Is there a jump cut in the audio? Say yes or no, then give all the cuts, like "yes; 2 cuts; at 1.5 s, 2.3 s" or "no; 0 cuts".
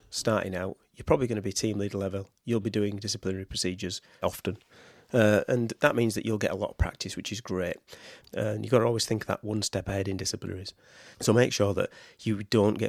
yes; 3 cuts; at 4.2 s, 8.2 s, 11.1 s